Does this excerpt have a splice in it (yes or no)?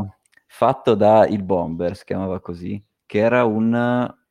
no